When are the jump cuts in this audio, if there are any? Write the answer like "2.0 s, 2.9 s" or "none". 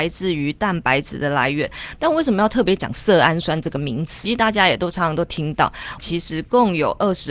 4.3 s, 6.0 s